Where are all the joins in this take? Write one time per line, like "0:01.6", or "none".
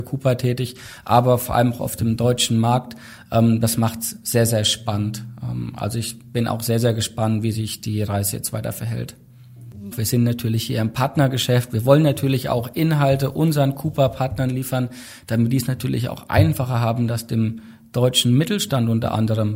0:09.9